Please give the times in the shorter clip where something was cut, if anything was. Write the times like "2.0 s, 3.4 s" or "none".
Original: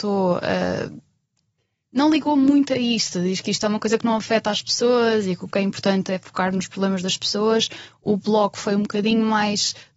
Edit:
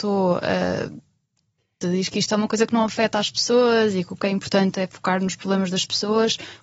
1.8 s